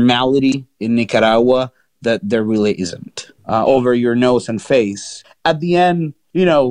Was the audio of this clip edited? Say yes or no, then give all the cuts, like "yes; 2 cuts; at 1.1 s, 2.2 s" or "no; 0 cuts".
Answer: yes; 1 cut; at 3.4 s